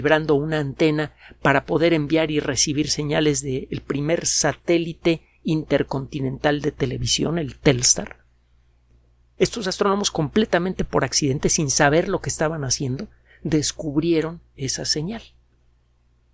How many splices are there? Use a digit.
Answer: 1